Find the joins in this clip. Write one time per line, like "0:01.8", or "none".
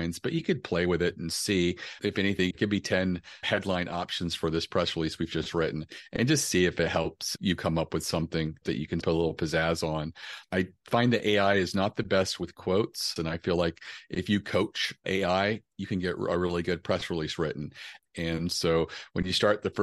0:02.5
0:13.2
0:18.0